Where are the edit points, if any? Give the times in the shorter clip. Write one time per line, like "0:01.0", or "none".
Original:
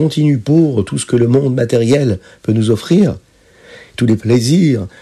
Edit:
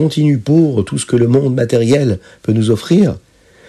none

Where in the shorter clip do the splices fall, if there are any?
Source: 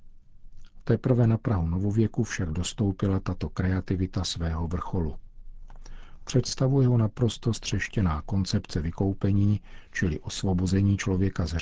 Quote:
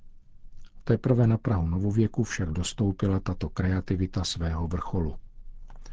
none

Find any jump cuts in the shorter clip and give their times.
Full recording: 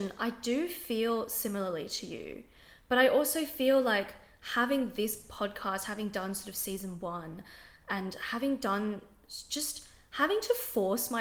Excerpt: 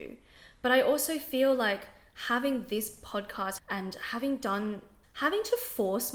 0:03.6
0:05.0

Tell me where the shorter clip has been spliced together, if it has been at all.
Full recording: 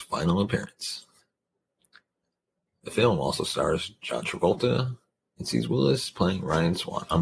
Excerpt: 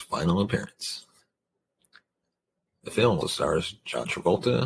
0:03.2

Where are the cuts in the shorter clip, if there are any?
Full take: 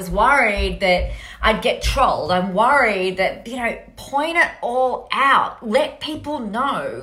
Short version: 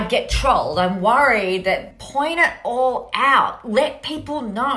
0:01.9

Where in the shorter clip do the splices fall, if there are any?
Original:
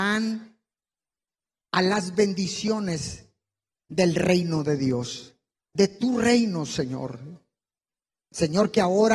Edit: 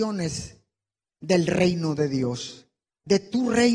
none

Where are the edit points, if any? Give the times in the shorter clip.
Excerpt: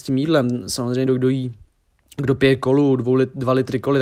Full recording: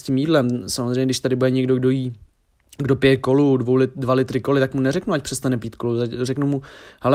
0:01.1

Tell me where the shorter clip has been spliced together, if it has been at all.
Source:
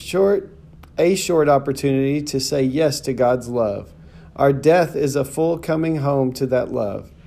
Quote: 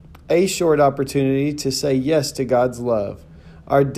none

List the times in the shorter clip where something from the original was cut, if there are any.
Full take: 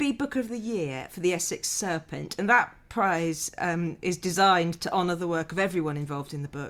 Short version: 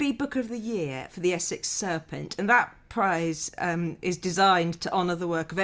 none

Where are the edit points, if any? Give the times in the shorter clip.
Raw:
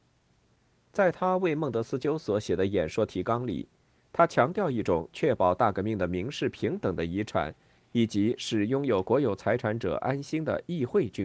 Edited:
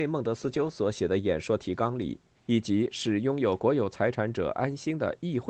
0:02.3

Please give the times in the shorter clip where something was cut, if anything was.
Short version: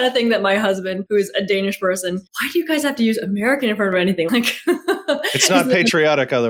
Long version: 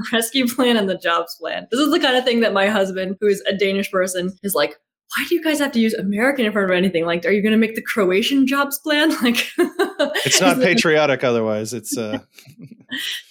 0:02.3
0:04.3

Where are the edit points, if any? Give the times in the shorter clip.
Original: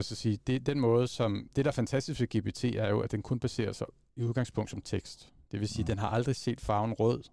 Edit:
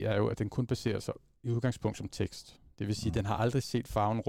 none

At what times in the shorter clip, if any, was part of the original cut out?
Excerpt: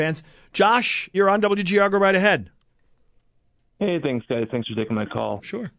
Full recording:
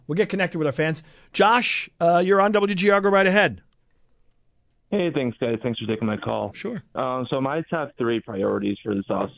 0:01.1

